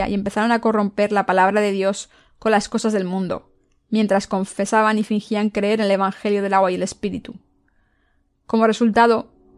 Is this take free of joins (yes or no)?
yes